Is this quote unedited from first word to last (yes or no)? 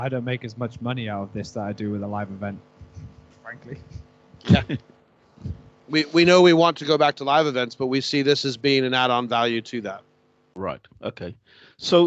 yes